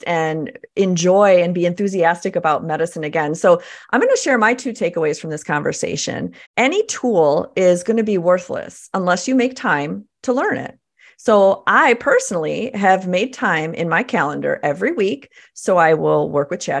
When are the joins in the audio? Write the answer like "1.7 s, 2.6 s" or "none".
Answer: 6.4 s